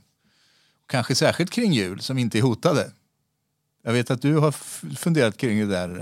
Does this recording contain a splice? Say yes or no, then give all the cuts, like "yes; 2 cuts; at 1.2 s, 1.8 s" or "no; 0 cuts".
no; 0 cuts